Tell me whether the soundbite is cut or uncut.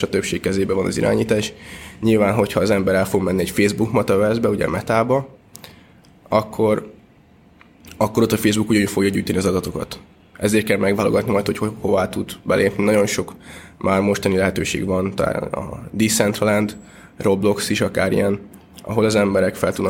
uncut